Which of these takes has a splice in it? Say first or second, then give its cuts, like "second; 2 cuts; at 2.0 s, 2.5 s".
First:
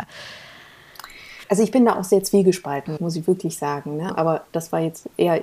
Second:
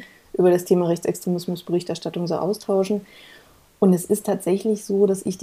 first; 3 cuts; at 1.4 s, 3.0 s, 4.1 s